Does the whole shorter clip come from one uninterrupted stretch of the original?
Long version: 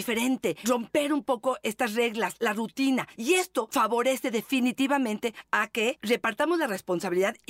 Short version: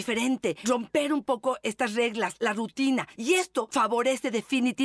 yes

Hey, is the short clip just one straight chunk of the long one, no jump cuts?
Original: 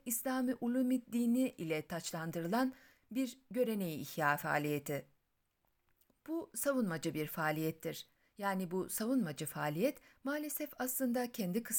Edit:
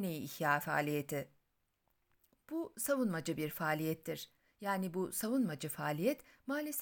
yes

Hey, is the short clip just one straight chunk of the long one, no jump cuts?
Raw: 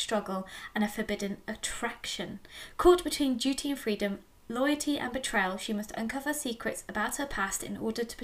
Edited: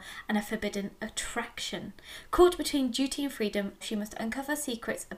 no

